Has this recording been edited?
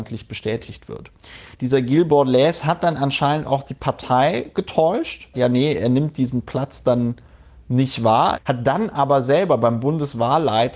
yes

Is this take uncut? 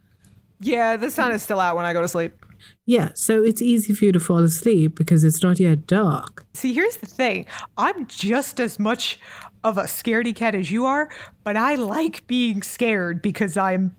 no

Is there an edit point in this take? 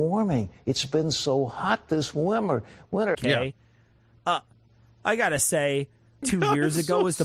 yes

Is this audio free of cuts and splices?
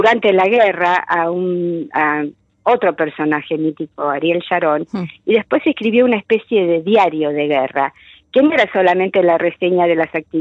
yes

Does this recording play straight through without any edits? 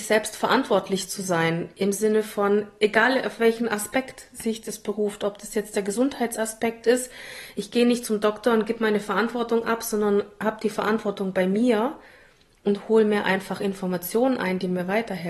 yes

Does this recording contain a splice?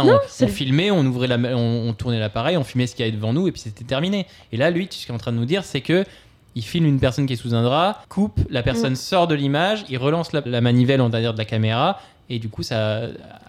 yes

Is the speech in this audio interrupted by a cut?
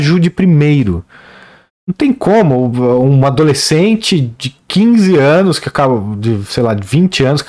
no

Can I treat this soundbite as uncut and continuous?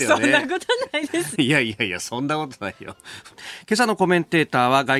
no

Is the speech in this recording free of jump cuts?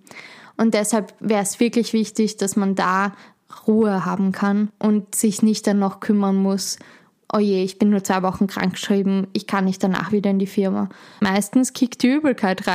no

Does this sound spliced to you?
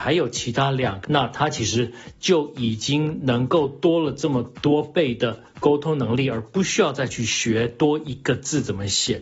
yes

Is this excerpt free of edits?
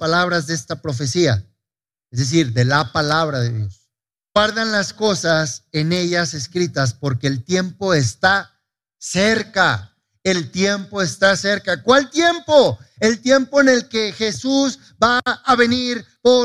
yes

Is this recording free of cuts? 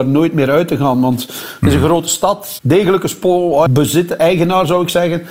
no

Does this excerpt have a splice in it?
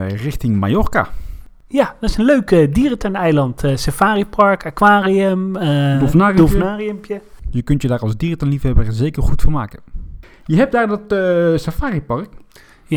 no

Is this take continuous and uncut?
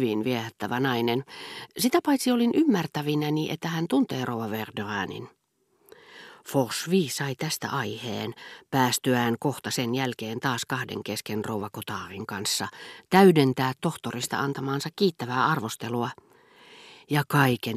yes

